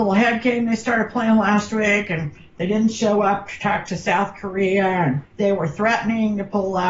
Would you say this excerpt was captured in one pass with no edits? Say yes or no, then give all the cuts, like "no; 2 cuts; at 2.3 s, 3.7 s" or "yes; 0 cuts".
yes; 0 cuts